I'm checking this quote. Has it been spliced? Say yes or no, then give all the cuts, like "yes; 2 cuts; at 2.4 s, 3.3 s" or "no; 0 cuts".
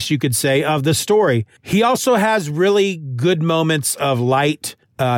no; 0 cuts